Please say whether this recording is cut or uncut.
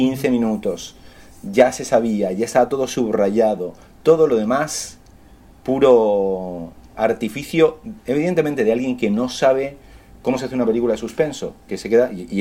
uncut